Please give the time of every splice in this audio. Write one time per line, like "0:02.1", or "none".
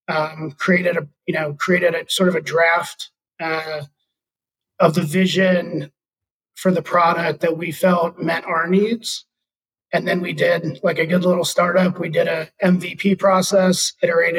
none